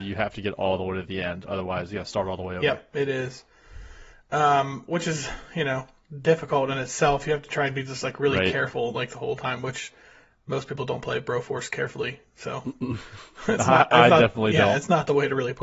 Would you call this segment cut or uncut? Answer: uncut